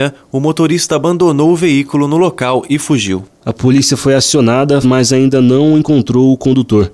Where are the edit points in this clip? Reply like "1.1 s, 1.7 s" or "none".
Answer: 4.8 s